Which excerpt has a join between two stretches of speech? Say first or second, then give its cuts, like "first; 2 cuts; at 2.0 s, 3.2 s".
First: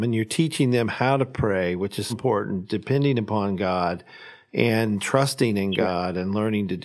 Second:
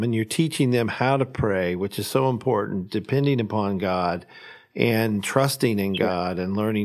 first; 1 cut; at 2.1 s